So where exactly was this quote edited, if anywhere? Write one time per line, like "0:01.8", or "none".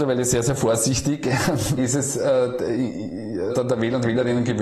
0:01.8
0:03.5